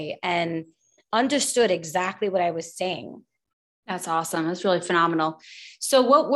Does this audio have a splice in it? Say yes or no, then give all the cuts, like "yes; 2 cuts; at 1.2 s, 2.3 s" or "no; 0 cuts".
no; 0 cuts